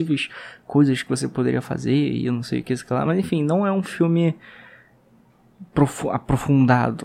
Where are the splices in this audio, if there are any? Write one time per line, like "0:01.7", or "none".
none